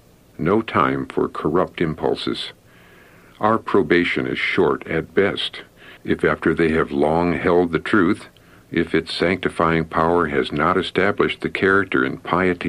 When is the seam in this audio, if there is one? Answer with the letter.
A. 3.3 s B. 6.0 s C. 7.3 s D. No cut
B